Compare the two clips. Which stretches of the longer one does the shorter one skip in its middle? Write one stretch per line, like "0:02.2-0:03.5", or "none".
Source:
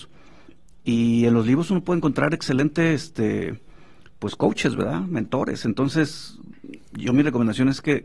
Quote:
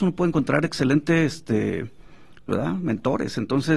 0:04.2-0:04.8